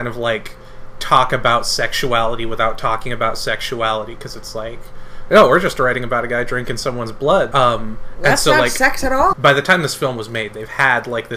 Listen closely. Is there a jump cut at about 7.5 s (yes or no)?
yes